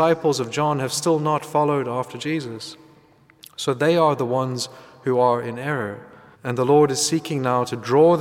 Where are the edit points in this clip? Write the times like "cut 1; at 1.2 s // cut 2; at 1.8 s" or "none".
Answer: cut 1; at 6.3 s